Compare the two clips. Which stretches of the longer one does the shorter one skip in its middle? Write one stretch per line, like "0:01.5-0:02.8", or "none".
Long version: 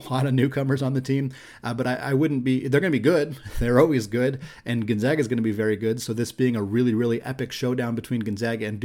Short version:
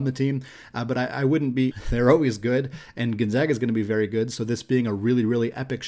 0:02.6-0:03.4